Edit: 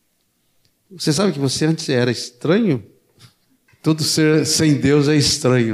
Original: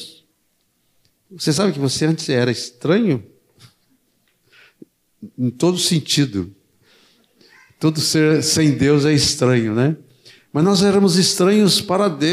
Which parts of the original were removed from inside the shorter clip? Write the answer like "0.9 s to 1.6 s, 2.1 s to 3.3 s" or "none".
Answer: 4.1 s to 7.7 s